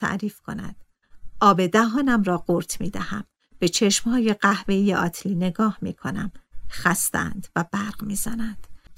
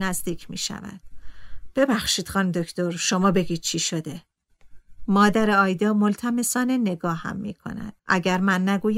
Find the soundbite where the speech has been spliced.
second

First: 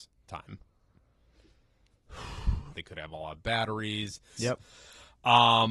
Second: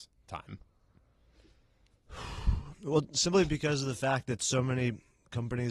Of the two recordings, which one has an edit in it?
first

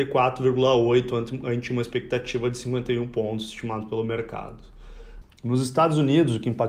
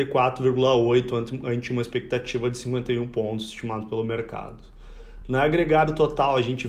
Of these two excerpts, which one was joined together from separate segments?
first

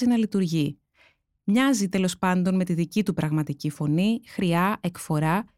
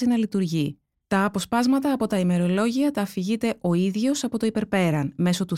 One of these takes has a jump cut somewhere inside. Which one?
second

